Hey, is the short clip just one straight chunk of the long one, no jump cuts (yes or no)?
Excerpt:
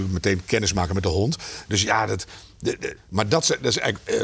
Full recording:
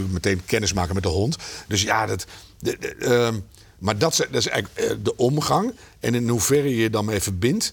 no